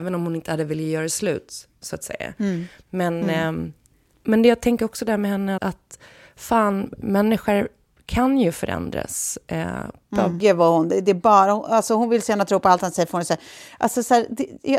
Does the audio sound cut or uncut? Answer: cut